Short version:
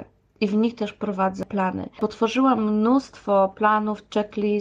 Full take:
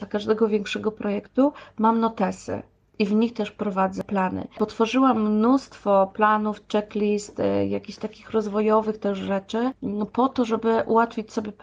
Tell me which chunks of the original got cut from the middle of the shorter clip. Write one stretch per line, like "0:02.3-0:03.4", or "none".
none